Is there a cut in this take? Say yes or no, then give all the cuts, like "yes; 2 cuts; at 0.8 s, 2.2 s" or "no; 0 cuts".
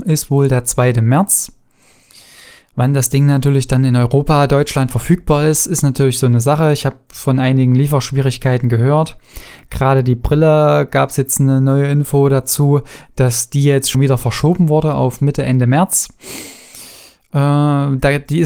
yes; 1 cut; at 13.9 s